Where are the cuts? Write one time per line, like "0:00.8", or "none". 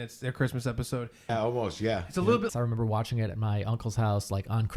0:01.3
0:02.5

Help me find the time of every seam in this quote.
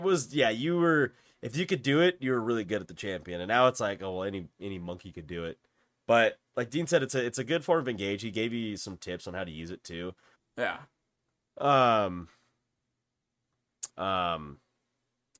0:10.3
0:13.9

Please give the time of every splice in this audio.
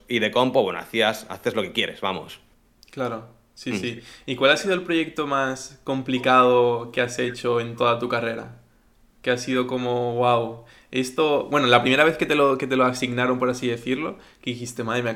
none

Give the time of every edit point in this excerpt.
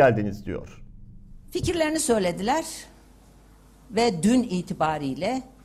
none

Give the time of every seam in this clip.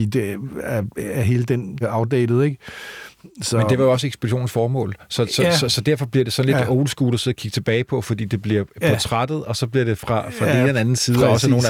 0:01.8

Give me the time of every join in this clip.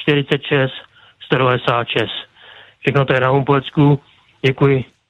none

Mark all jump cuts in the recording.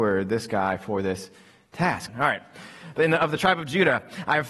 0:02.1

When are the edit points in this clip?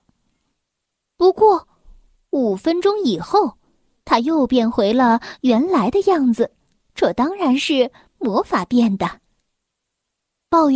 none

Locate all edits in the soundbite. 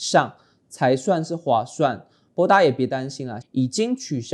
0:02.2
0:03.4

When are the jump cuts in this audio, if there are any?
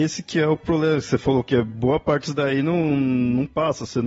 none

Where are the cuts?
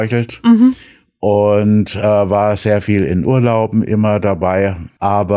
none

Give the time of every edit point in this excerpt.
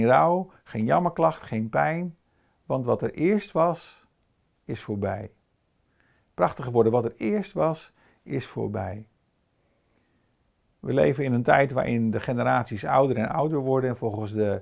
none

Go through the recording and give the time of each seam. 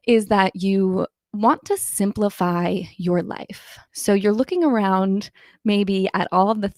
0:03.9

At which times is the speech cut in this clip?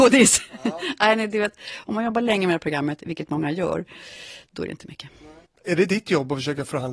none

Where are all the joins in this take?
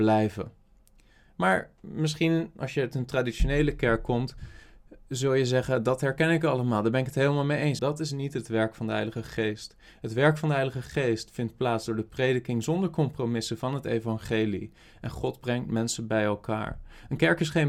0:07.8

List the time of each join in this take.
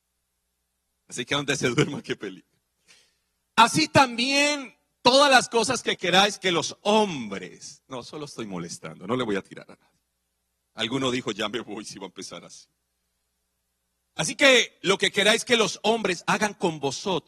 none

